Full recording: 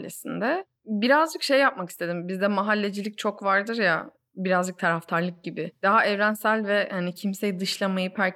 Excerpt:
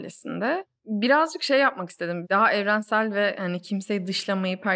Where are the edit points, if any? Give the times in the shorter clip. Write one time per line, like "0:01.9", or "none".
0:02.2